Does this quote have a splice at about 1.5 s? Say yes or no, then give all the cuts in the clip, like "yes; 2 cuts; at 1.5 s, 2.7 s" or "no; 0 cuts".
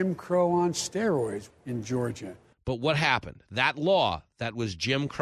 yes; 1 cut; at 1.5 s